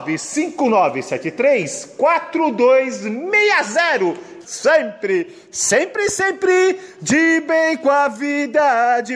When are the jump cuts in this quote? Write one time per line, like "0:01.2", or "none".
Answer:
0:04.4